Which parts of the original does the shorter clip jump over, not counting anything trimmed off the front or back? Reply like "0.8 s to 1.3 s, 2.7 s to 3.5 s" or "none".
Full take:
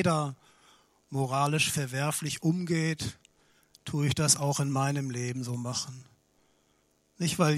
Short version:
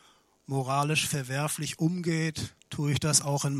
3.3 s to 3.8 s